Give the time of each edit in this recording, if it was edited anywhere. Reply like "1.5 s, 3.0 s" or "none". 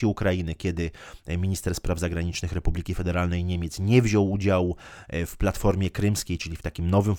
none